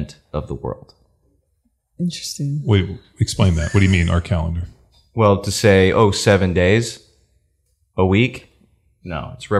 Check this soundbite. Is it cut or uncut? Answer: uncut